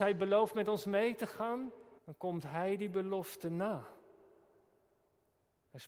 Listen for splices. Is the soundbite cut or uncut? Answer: cut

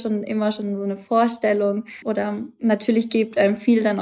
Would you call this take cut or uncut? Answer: cut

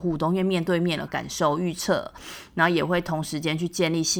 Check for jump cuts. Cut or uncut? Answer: cut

